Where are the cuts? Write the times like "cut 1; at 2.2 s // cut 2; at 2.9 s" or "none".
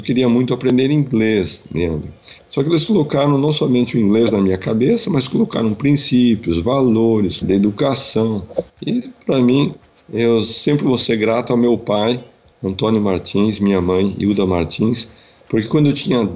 cut 1; at 2.4 s // cut 2; at 7.4 s // cut 3; at 8.7 s